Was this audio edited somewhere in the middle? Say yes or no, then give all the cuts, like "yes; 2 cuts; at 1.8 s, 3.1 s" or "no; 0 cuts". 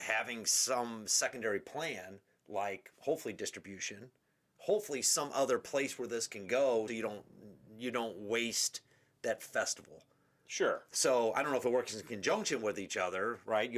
yes; 1 cut; at 6.9 s